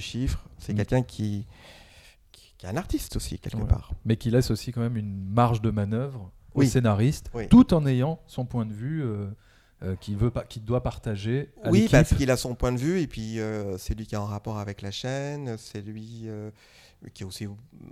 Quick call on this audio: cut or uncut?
uncut